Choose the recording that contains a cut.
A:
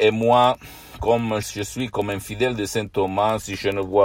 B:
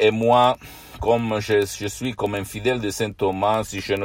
A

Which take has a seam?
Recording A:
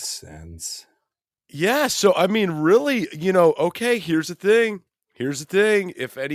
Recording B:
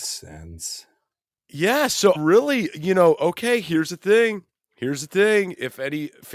B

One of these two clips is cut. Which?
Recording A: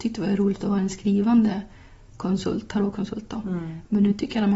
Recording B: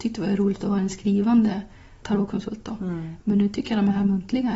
B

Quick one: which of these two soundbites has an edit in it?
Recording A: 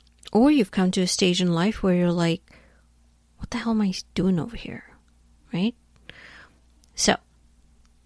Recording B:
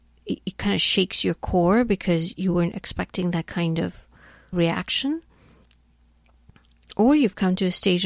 B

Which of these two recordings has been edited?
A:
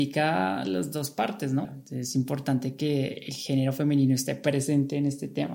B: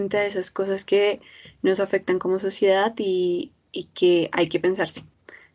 A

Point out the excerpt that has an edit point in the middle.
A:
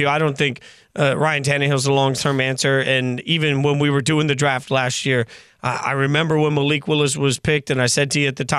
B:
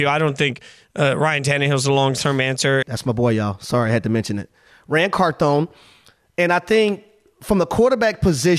B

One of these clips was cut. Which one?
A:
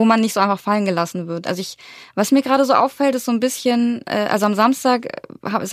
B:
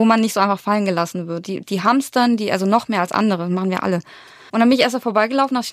B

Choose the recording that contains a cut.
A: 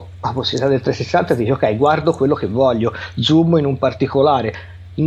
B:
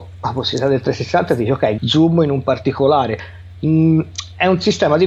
B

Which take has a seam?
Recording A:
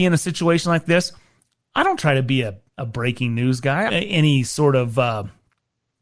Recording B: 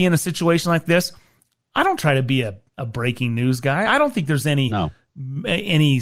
A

